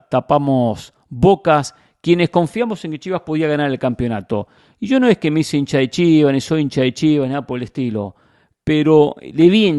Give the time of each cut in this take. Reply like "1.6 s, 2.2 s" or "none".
none